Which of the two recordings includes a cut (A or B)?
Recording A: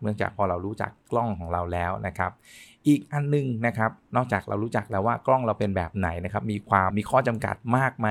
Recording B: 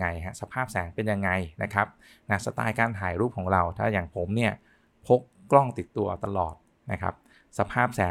A